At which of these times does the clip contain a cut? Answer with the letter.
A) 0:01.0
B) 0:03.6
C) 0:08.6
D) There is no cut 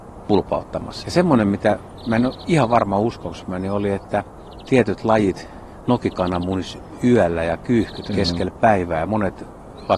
A